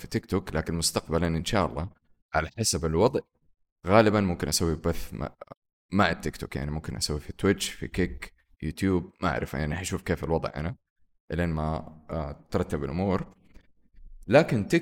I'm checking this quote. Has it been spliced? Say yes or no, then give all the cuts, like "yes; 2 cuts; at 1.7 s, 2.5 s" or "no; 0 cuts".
no; 0 cuts